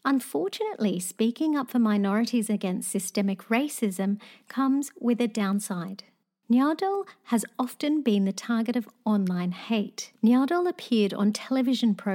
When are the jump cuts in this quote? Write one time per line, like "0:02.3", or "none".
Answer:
0:10.1